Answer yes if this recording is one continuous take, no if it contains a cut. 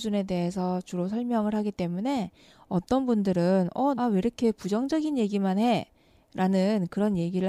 no